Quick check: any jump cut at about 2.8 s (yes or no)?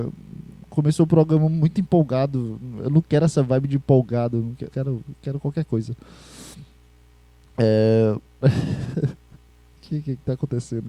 no